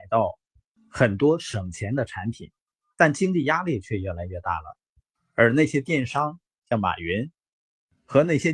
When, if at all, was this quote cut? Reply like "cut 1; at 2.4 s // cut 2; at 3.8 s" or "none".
none